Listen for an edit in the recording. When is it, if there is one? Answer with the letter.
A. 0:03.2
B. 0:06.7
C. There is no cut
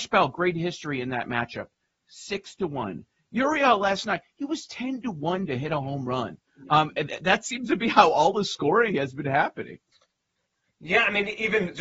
C